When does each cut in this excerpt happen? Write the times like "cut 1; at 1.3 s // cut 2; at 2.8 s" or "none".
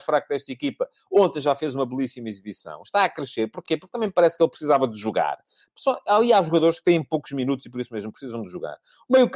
none